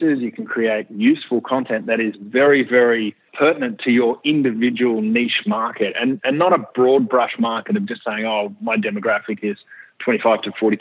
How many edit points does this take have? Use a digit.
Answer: 1